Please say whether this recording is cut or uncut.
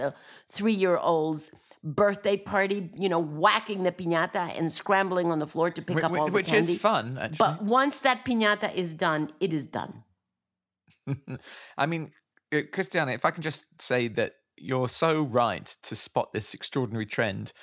uncut